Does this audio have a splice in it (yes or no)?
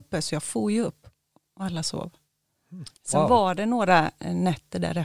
no